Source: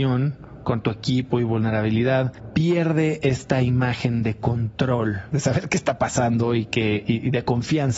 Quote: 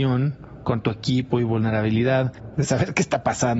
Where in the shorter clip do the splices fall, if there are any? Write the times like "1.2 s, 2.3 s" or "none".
2.5 s